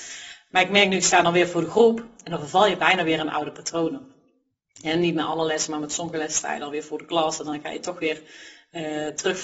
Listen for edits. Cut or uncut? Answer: uncut